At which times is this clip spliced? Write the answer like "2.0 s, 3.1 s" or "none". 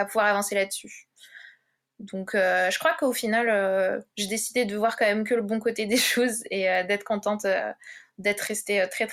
none